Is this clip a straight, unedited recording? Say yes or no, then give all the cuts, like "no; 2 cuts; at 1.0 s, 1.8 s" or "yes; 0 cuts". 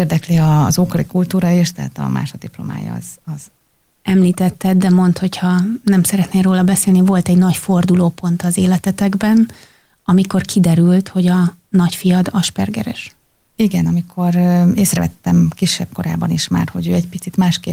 yes; 0 cuts